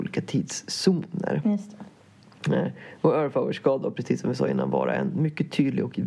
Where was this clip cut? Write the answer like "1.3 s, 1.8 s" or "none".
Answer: none